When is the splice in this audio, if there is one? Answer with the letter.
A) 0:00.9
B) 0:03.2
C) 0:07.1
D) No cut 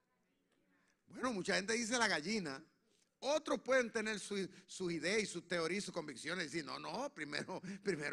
D